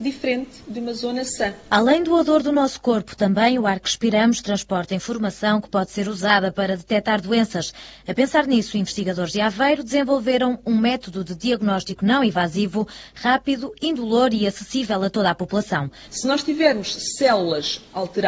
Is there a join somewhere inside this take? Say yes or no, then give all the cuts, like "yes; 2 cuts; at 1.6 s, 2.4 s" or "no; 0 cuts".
yes; 1 cut; at 16.0 s